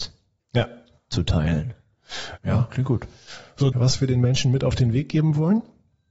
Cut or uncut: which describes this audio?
cut